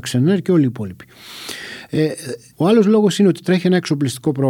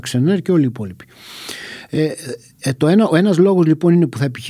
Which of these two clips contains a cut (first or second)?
first